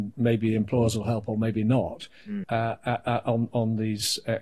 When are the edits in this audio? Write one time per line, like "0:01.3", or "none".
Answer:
0:02.4